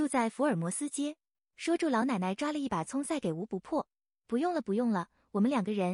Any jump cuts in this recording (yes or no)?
yes